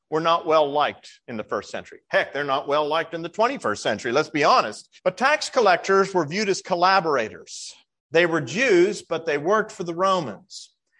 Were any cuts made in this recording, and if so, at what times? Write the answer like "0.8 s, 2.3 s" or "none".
5.0 s